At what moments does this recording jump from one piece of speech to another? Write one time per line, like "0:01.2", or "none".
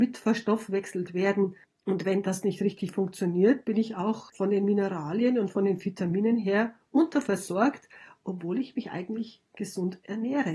none